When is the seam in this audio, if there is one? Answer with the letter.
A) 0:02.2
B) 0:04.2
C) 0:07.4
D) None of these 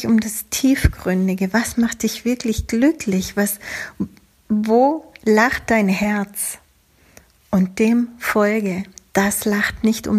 D